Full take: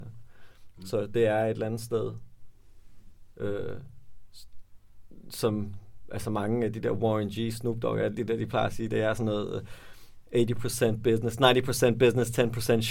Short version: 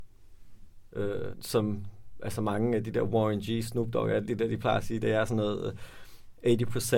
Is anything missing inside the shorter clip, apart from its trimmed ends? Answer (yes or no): yes